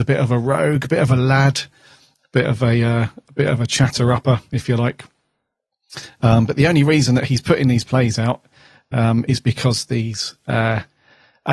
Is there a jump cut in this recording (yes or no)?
no